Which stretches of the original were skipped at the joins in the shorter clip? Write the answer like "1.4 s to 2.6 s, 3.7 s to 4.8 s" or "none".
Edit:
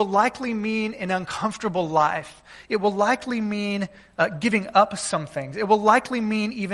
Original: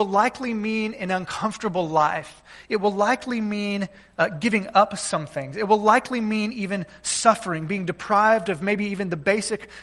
none